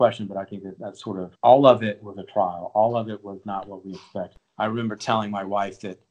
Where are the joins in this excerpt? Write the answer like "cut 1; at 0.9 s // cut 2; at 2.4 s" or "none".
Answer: none